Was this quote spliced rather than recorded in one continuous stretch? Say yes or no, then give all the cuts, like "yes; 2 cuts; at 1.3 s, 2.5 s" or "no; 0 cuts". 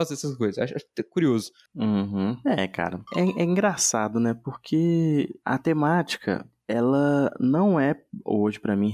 no; 0 cuts